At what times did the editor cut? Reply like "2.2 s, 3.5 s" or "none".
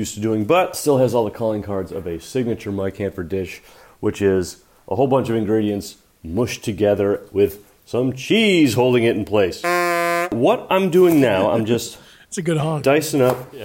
none